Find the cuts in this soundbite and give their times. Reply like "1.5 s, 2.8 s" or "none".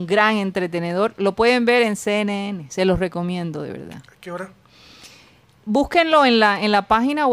none